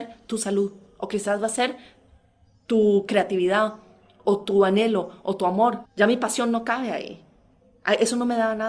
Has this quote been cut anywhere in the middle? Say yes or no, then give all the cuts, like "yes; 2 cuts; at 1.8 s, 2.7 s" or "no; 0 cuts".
yes; 1 cut; at 5.8 s